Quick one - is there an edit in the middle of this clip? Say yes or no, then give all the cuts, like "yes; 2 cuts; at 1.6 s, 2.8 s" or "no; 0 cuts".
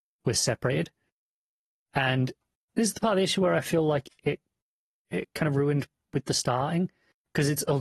no; 0 cuts